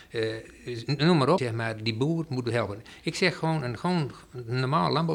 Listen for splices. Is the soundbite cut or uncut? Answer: cut